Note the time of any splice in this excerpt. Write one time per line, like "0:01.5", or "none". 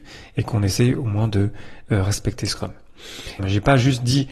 0:03.4